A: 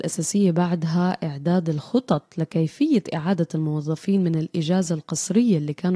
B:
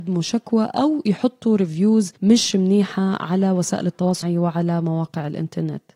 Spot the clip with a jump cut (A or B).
B